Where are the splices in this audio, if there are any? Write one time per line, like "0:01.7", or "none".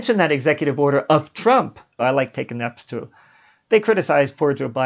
0:02.0